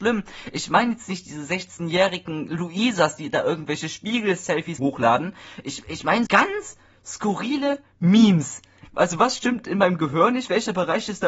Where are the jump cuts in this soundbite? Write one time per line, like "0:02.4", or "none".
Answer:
0:04.8
0:06.3
0:08.8